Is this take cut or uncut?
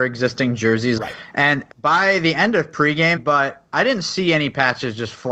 cut